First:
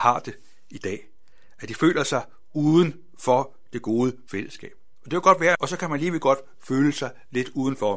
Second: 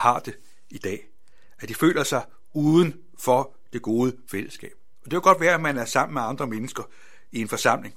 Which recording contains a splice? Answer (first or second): first